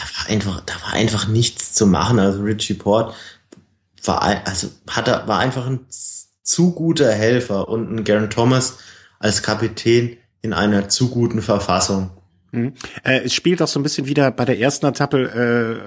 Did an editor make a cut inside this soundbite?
no; 0 cuts

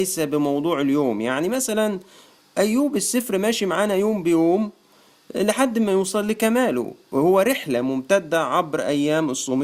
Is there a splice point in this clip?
yes; 1 cut; at 2.4 s

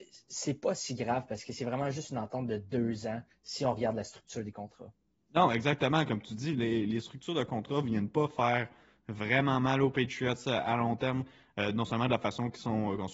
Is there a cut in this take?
no; 0 cuts

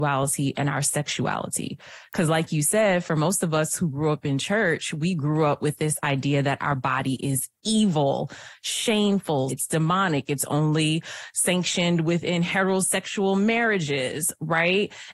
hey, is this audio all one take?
no; 1 cut; at 9.5 s

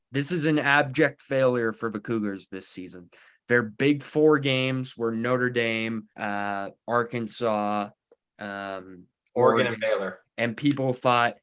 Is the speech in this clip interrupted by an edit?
yes; 2 cuts; at 6.1 s, 10.2 s

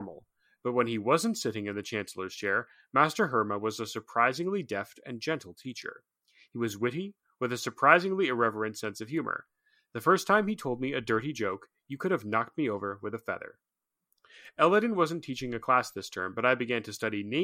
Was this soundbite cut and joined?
no; 0 cuts

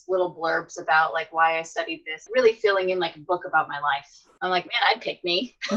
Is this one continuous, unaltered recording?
no; 1 cut; at 2.3 s

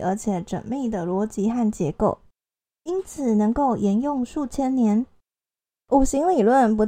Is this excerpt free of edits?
no; 1 cut; at 5.8 s

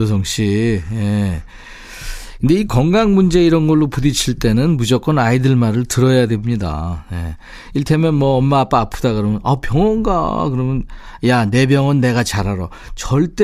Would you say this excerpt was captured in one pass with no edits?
yes; 0 cuts

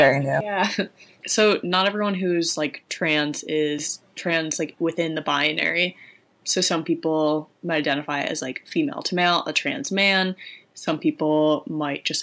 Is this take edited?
no; 0 cuts

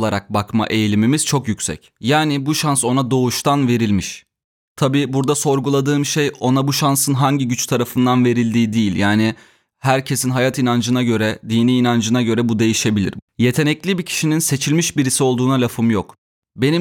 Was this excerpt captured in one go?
yes; 0 cuts

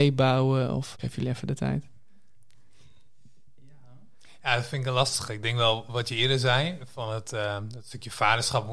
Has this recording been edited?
yes; 1 cut; at 0.9 s

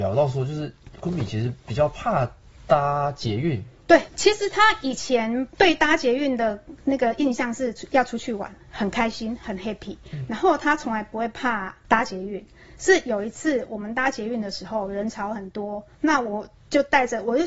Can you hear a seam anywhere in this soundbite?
yes; 1 cut; at 4.1 s

